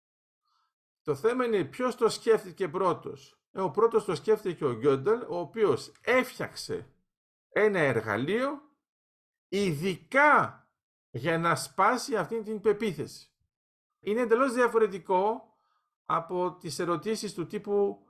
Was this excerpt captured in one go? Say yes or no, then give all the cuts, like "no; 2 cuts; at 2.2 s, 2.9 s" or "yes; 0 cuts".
no; 1 cut; at 14.0 s